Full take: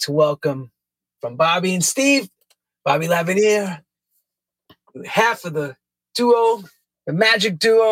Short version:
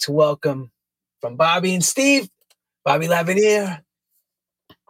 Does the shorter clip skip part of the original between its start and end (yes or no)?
no